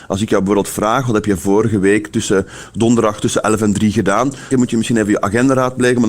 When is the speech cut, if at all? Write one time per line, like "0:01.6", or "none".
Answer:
0:04.5